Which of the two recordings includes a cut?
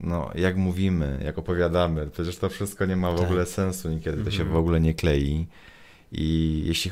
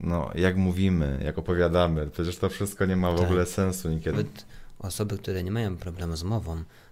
second; 1 cut; at 4.1 s

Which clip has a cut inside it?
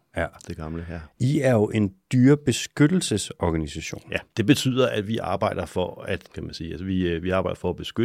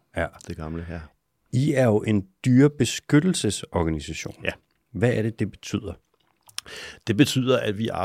first; 3 cuts; at 1.1 s, 4.3 s, 6.2 s

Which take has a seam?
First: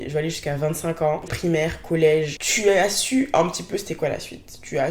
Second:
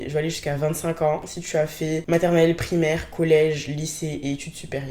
first; 2 cuts; at 1.3 s, 2.4 s

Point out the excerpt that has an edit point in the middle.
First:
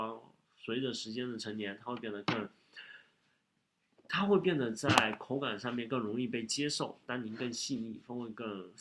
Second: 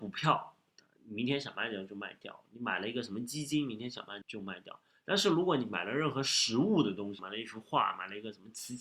second; 2 cuts; at 4.2 s, 7.2 s

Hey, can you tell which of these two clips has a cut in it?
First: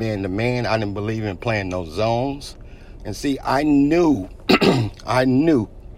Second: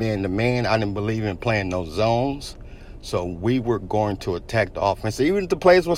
first; 1 cut; at 3.0 s

